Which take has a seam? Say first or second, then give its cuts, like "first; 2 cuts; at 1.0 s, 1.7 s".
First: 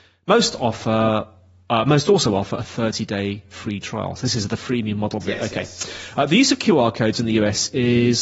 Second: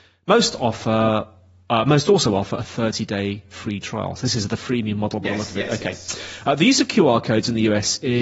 first; 1 cut; at 5.2 s